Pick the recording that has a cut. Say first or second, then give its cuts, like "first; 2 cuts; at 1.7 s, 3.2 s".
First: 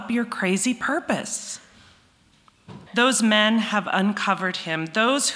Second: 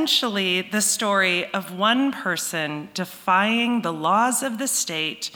first; 1 cut; at 2.9 s